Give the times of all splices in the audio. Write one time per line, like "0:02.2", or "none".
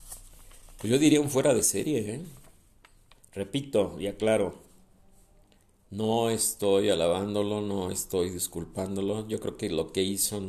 none